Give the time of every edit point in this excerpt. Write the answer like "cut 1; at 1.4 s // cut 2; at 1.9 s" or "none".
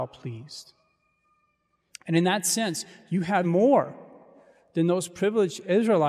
cut 1; at 1.9 s // cut 2; at 3.4 s